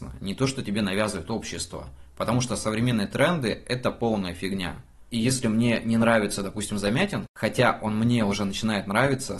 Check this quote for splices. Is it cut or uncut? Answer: cut